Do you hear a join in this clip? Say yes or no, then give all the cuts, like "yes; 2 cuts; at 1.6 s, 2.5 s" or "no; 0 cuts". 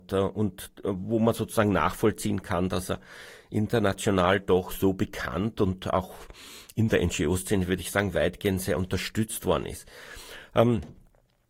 no; 0 cuts